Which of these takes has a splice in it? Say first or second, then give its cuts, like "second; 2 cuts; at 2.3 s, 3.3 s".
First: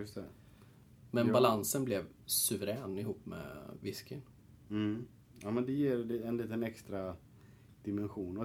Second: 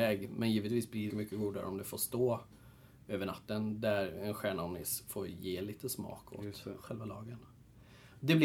second; 1 cut; at 1.1 s